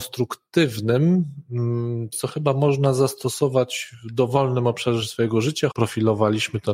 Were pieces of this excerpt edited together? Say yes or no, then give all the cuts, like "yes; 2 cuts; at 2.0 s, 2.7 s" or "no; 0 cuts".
yes; 2 cuts; at 2.1 s, 5.7 s